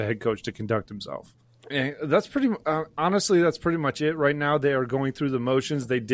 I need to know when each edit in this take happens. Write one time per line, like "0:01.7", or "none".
0:01.5